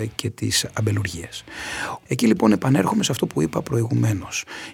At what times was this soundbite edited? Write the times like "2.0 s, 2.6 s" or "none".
2.0 s